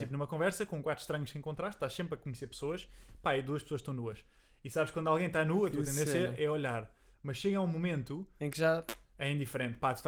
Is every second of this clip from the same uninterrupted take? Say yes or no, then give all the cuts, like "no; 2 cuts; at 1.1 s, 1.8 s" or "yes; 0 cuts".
yes; 0 cuts